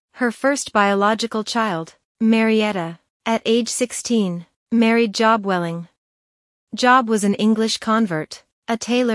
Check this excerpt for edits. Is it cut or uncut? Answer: uncut